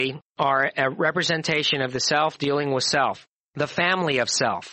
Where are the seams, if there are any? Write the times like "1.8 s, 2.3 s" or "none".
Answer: 3.4 s